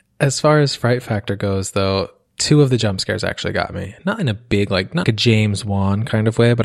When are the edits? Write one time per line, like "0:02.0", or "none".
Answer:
0:05.0